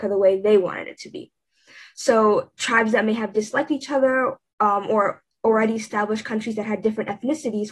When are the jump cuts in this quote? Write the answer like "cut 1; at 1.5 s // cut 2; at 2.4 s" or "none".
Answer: none